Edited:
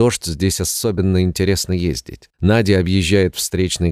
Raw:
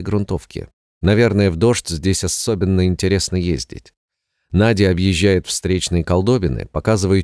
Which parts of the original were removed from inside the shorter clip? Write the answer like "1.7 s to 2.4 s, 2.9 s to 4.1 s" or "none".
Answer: 4.0 s to 4.4 s